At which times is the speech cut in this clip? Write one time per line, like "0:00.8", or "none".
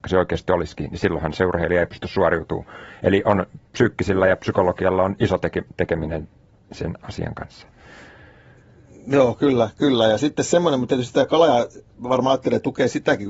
none